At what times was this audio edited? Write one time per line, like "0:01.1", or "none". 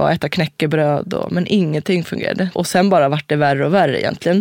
0:02.5